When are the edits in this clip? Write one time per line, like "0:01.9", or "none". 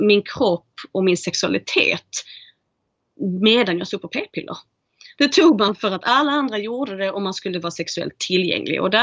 0:05.2